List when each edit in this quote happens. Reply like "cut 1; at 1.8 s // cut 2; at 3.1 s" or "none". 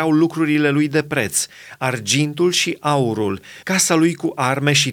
cut 1; at 3.6 s

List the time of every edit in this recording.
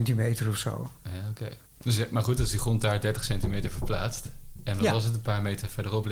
cut 1; at 1.6 s

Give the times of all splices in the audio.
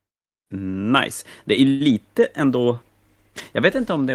none

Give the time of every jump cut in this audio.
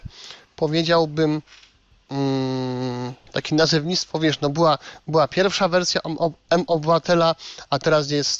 none

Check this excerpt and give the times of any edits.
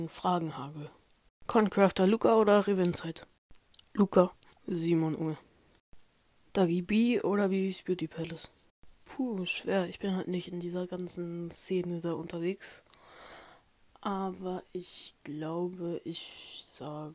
cut 1; at 4.5 s

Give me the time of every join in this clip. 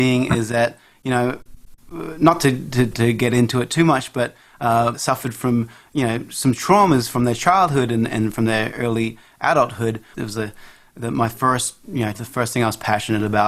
cut 1; at 4.9 s // cut 2; at 10.1 s // cut 3; at 12.1 s

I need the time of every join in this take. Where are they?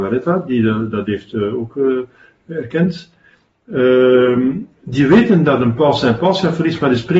none

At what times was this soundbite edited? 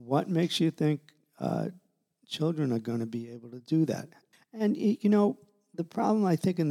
cut 1; at 4.3 s

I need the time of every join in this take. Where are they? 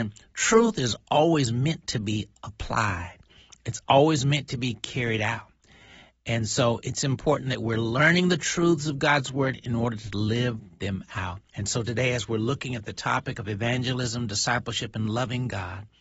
cut 1; at 11.5 s

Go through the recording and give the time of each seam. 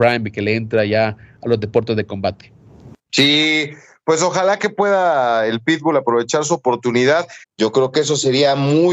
cut 1; at 3.0 s // cut 2; at 7.4 s

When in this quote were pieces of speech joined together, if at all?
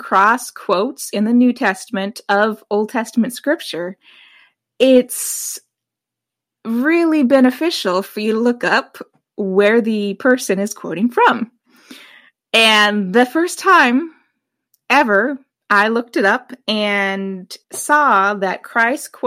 cut 1; at 17.6 s

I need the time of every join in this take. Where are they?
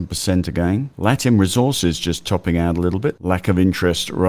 none

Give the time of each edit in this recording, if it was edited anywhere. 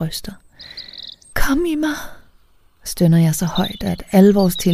cut 1; at 1.3 s

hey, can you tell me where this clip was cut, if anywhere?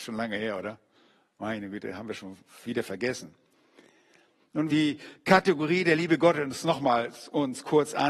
cut 1; at 4.7 s

